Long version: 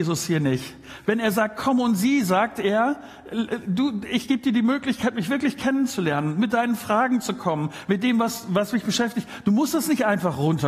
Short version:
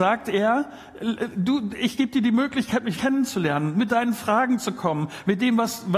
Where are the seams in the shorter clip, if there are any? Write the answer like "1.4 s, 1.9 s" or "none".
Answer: 2.9 s